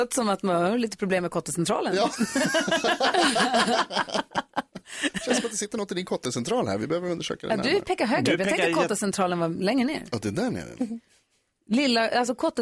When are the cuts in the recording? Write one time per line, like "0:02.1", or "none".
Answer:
0:10.8